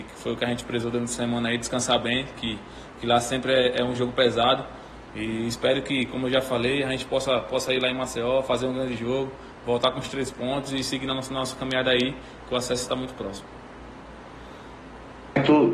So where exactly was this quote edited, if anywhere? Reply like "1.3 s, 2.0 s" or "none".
none